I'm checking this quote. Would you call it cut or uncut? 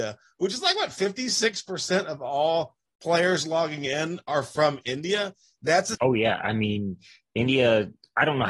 cut